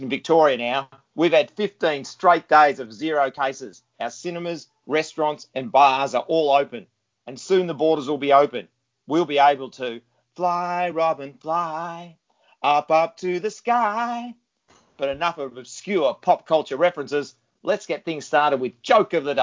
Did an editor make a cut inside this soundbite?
no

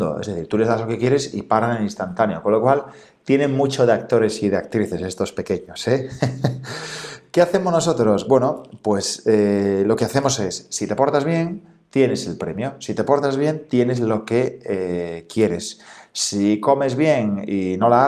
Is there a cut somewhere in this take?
no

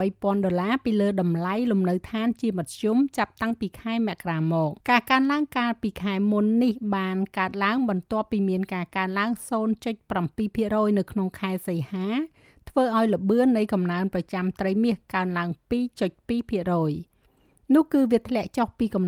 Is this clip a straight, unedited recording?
no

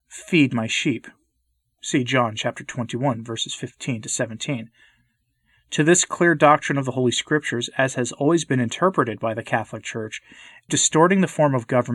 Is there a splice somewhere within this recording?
yes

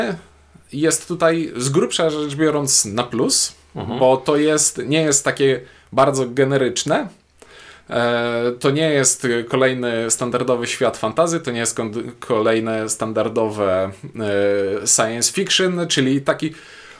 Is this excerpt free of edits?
yes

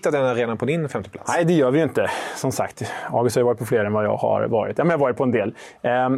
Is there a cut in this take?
no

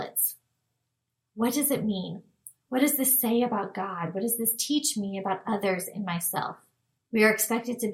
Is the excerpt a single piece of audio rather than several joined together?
no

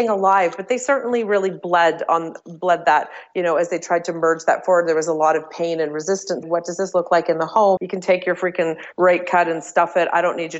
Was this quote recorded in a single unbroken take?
no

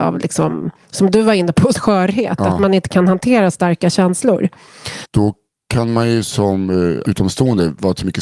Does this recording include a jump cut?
yes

